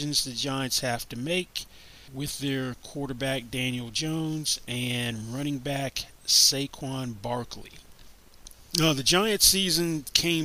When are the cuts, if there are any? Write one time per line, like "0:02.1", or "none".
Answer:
none